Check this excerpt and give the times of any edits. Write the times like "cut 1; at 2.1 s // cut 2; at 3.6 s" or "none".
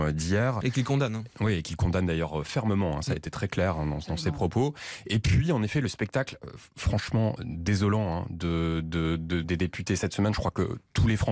none